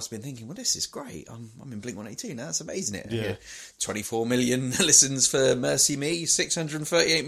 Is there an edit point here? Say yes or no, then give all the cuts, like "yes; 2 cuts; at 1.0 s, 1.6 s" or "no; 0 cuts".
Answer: no; 0 cuts